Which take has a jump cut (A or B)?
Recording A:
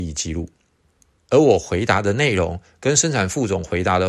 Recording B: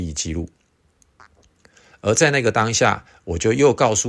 A